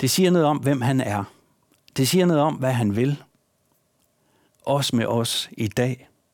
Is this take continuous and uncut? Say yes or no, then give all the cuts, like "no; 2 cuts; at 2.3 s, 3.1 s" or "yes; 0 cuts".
yes; 0 cuts